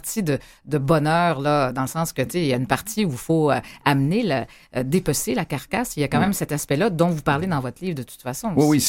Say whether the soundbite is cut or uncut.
uncut